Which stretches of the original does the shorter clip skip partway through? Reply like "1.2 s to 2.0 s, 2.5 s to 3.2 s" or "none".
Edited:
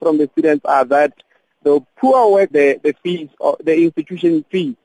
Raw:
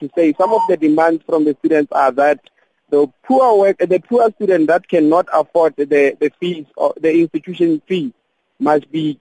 3.8 s to 5.9 s